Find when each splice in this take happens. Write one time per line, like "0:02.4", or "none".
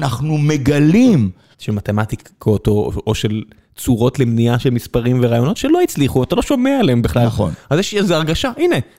0:01.5